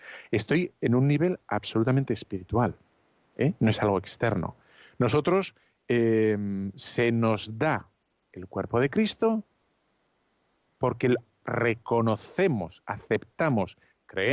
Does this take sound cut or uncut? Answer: uncut